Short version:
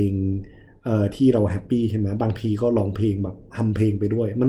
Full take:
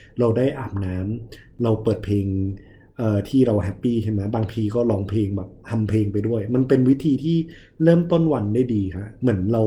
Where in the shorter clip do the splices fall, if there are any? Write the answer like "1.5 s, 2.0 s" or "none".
none

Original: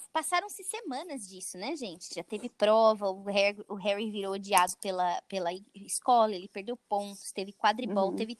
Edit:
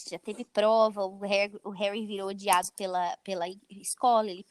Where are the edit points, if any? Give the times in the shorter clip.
none

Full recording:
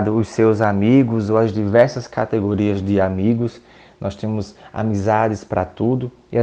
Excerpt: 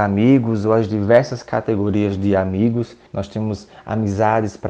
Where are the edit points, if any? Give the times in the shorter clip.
3.1 s

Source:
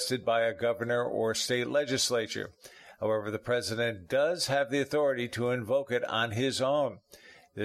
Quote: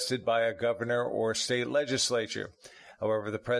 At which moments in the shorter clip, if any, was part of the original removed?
none

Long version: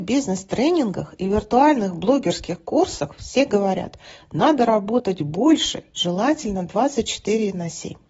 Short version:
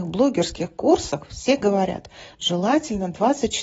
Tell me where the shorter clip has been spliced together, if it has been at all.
2.3 s

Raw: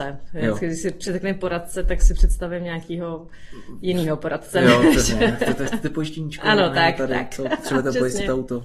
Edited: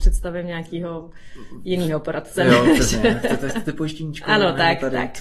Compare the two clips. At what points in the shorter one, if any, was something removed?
none

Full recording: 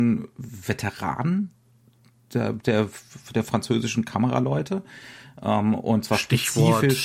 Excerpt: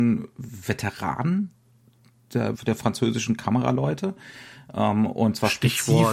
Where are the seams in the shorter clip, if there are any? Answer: 2.5 s

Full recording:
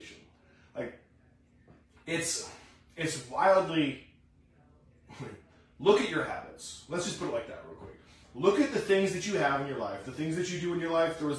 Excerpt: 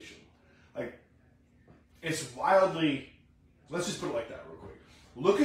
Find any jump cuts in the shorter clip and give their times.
1.9 s, 3.7 s

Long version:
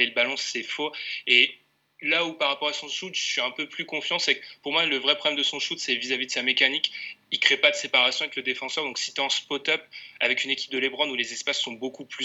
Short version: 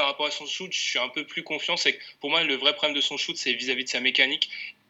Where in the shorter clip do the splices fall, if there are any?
none

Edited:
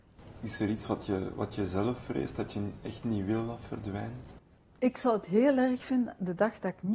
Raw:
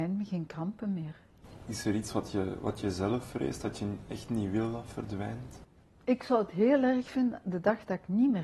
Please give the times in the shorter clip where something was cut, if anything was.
none

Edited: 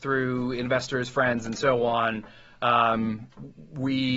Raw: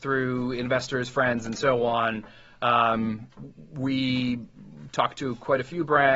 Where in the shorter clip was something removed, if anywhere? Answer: none

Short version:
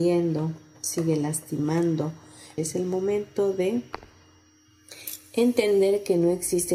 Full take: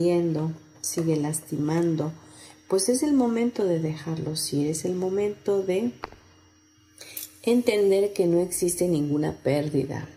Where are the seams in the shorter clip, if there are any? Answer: 2.6 s

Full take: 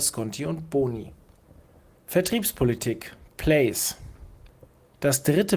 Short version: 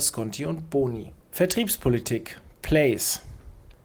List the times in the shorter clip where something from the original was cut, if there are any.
1.2 s

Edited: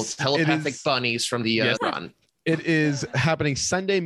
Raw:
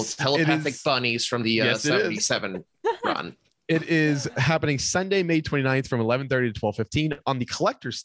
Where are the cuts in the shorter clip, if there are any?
1.8 s

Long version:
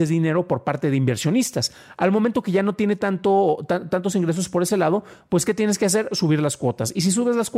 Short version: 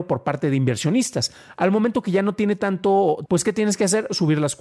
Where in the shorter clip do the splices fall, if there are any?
3.3 s

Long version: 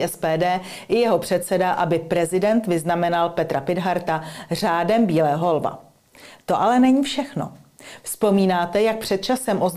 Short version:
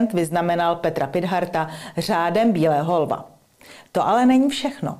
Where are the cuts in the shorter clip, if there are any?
none

